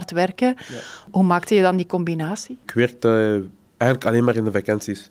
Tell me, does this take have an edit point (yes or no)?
no